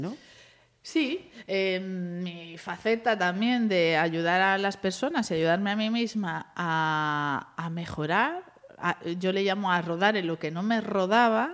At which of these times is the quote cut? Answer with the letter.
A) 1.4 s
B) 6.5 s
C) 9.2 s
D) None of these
D